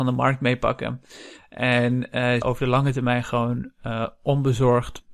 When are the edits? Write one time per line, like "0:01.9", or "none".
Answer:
0:02.4